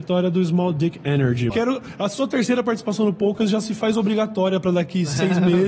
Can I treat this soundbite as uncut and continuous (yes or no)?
no